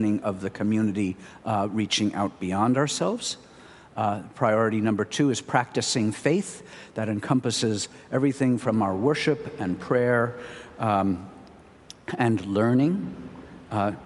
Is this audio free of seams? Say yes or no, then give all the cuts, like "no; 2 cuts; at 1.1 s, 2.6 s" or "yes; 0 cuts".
yes; 0 cuts